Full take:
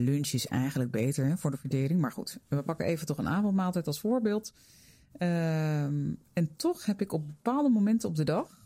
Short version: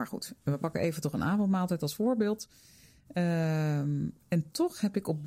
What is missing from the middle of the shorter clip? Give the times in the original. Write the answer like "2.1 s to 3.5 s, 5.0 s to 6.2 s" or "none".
none